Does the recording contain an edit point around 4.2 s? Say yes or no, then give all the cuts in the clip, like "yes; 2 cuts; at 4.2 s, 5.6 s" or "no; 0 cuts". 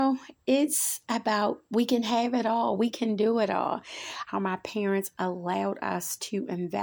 yes; 1 cut; at 4.2 s